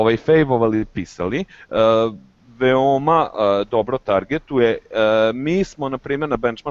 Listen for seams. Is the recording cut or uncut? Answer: uncut